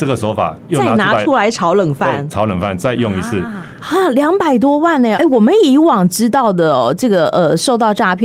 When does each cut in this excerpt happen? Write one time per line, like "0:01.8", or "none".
0:03.8
0:05.1